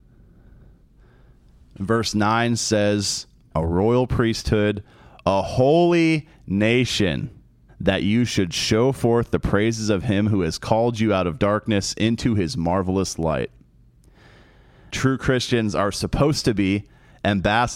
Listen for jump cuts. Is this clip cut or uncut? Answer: cut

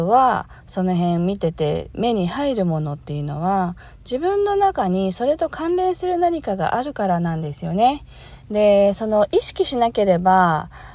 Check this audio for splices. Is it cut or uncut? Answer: uncut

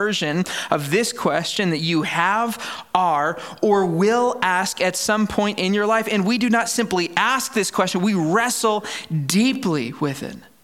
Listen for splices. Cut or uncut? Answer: uncut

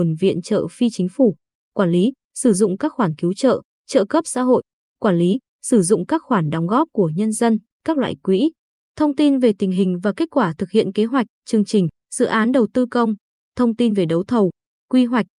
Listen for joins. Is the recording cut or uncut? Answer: uncut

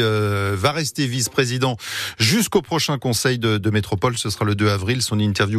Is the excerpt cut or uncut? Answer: uncut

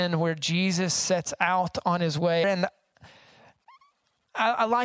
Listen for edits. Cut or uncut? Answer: cut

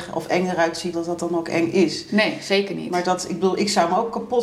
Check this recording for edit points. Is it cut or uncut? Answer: cut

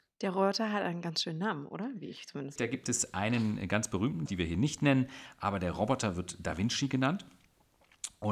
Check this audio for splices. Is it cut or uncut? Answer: cut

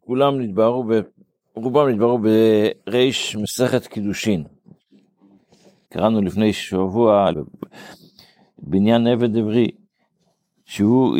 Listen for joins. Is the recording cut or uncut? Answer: cut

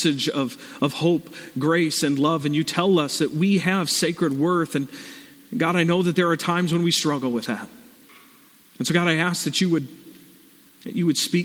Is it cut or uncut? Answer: uncut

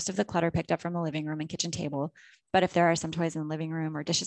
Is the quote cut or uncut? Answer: uncut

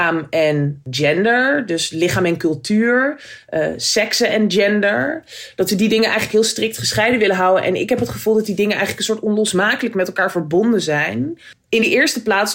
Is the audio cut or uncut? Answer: uncut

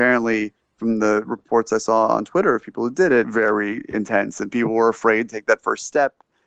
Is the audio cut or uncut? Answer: cut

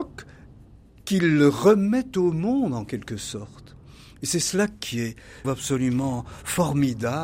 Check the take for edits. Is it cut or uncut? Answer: cut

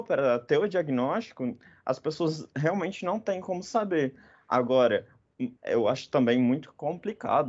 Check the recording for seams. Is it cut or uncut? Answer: cut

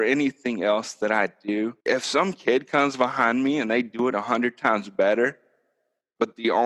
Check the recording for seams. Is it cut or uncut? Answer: cut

